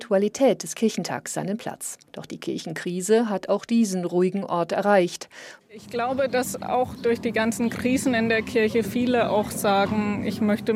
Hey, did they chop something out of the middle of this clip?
yes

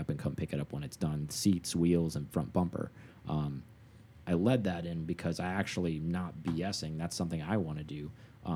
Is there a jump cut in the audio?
no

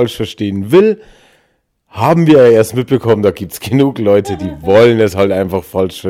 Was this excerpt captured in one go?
yes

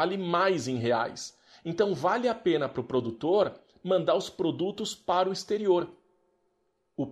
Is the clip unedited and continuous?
yes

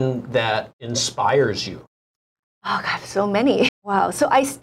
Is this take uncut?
no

